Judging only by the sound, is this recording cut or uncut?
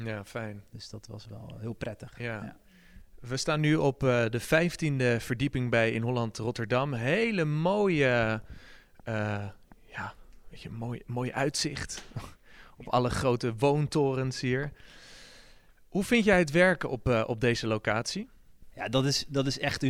uncut